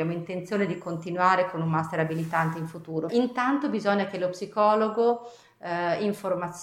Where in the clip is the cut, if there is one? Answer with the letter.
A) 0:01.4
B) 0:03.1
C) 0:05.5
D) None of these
B